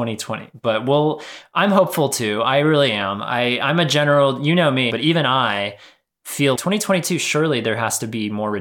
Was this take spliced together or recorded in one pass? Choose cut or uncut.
cut